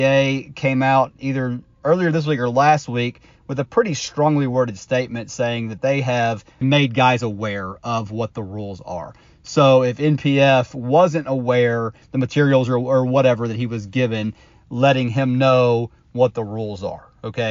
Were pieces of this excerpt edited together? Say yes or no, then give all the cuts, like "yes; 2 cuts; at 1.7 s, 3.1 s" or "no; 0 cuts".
yes; 2 cuts; at 6.6 s, 12.0 s